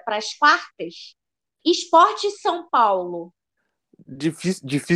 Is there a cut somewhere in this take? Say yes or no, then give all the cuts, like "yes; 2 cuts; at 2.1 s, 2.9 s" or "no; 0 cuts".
no; 0 cuts